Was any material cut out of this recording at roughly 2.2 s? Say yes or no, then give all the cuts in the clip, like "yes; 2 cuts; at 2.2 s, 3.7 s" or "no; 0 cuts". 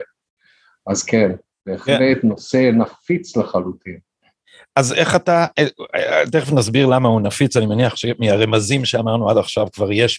no; 0 cuts